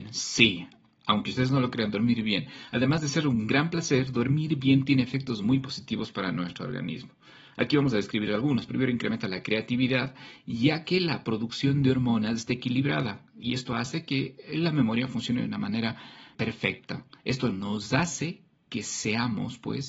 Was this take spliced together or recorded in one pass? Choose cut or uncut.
cut